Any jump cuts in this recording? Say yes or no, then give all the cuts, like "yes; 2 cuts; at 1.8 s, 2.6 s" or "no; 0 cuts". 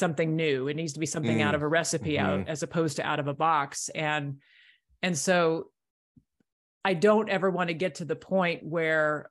no; 0 cuts